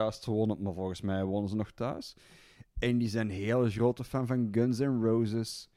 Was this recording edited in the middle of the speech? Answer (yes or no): no